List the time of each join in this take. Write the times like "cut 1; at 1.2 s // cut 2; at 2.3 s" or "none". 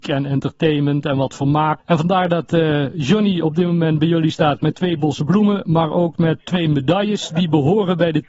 cut 1; at 1.8 s // cut 2; at 6.4 s